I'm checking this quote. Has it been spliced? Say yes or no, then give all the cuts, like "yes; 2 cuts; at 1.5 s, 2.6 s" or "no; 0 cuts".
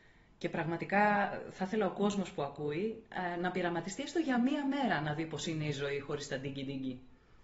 no; 0 cuts